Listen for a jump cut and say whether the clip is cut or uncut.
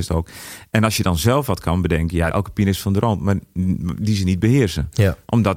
cut